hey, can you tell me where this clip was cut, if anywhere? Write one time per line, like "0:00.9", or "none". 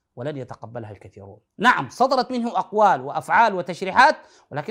0:01.5

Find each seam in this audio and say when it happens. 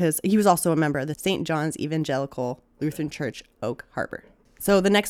none

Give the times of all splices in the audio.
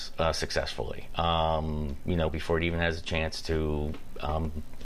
0:02.3

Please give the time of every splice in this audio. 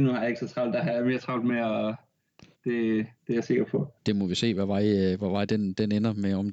0:02.5
0:04.0
0:05.5

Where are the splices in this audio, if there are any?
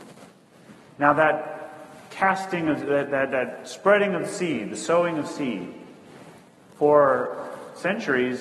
none

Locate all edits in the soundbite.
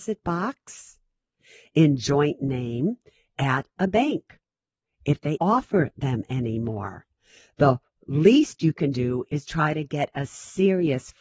0:05.4

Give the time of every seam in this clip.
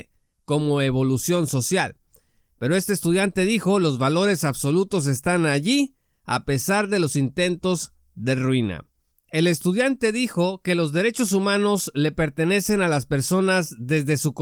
0:09.1

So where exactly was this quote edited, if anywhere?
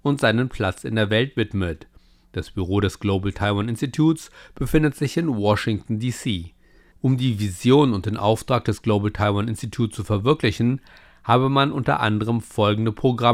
0:06.9

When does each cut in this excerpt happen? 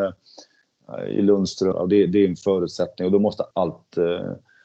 0:01.7
0:03.5

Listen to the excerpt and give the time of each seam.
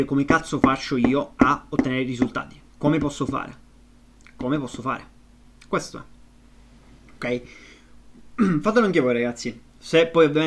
none

